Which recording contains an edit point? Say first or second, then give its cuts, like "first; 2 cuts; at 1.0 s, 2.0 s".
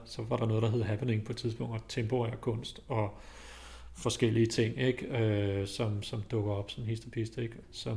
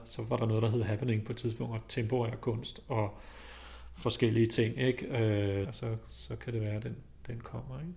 second; 1 cut; at 5.6 s